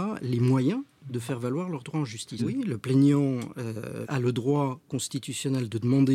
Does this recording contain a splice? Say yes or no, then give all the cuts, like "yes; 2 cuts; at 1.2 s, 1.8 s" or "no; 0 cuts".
yes; 2 cuts; at 2.4 s, 4.0 s